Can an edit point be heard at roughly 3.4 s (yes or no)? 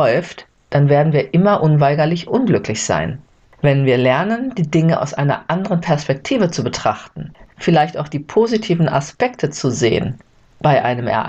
yes